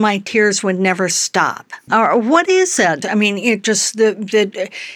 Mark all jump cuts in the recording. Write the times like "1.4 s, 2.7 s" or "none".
1.9 s, 3.0 s

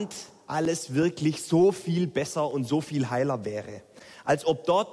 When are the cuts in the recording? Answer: none

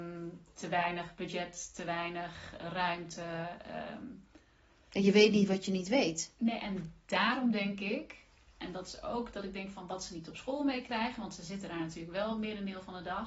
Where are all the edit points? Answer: none

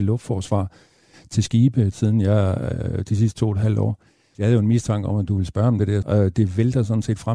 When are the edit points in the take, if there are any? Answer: 1.9 s, 4.3 s, 6.0 s

